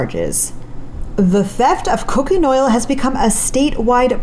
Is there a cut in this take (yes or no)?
no